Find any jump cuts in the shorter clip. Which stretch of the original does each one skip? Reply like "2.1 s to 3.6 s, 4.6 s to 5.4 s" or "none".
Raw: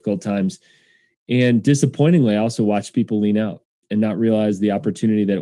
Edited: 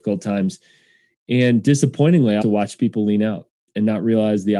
2.4 s to 2.6 s